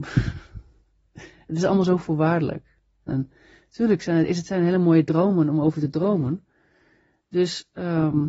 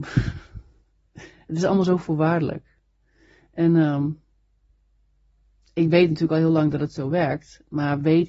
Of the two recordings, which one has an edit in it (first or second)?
first